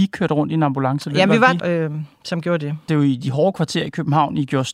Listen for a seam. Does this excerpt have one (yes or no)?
yes